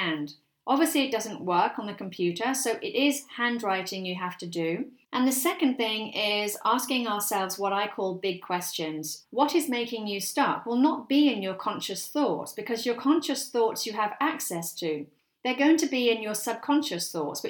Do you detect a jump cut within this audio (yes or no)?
yes